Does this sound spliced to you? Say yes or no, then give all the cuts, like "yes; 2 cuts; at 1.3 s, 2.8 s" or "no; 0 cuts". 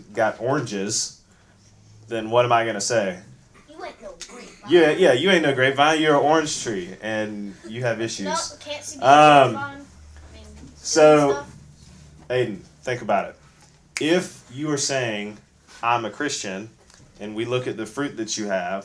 no; 0 cuts